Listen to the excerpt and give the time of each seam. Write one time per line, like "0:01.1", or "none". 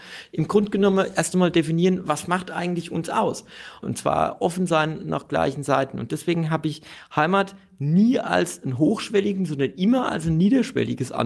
0:03.8